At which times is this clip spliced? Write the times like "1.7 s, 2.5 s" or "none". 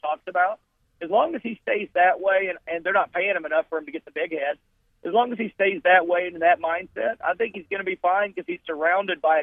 none